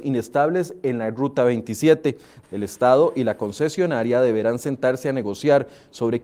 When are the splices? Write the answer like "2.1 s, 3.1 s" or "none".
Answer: 2.4 s